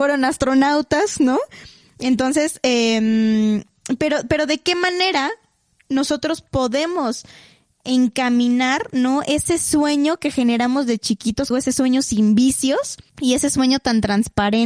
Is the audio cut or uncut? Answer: cut